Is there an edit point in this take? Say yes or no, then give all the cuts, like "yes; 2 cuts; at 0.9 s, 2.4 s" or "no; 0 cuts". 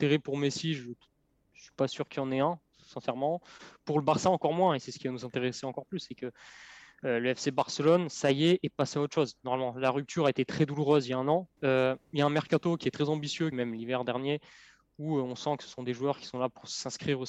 yes; 2 cuts; at 11.6 s, 13.5 s